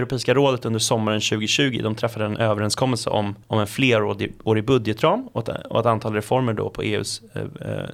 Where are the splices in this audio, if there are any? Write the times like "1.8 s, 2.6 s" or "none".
3.4 s